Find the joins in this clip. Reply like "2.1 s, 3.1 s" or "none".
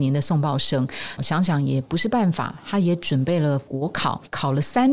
1.2 s